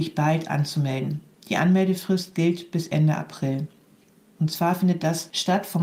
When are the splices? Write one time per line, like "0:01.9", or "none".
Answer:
0:04.3